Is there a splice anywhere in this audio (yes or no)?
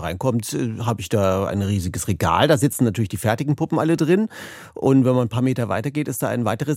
no